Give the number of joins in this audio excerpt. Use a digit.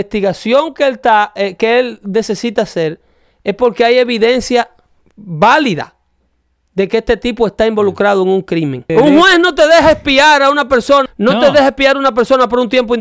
2